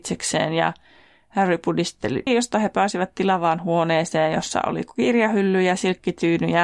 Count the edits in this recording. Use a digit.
1